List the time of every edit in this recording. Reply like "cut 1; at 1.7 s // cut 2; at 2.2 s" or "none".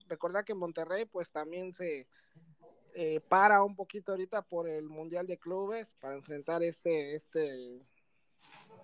cut 1; at 5.9 s